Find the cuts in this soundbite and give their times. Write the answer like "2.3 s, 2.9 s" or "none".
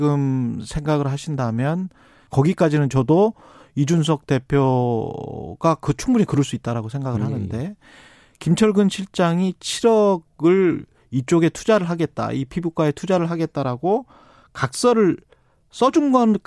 2.3 s